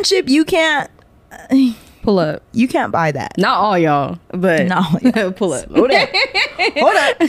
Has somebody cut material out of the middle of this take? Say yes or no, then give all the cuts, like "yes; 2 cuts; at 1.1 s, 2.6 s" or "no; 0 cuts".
no; 0 cuts